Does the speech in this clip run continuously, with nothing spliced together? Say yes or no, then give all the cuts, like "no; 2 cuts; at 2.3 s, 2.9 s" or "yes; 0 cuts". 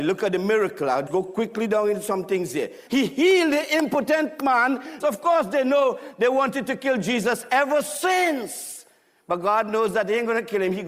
no; 3 cuts; at 1.1 s, 2.9 s, 5.0 s